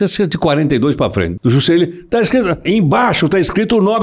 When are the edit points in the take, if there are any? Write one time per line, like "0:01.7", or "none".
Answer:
0:01.4
0:02.7